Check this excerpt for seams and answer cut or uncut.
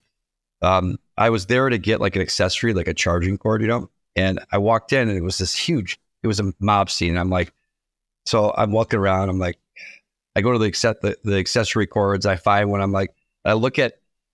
uncut